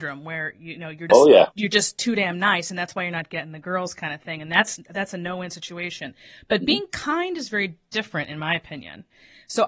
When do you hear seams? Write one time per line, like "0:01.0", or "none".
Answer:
0:01.1